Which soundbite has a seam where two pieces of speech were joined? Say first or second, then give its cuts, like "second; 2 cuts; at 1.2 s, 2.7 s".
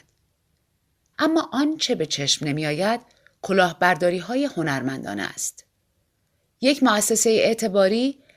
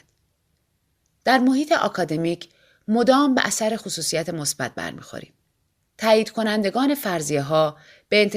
first; 1 cut; at 1.1 s